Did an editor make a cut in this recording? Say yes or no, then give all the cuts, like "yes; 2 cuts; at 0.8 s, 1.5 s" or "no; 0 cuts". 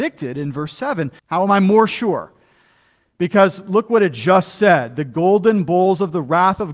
yes; 1 cut; at 1.2 s